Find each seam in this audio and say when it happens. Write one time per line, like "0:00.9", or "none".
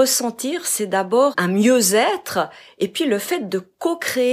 0:01.3